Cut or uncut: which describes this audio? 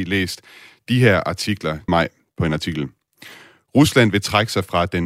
cut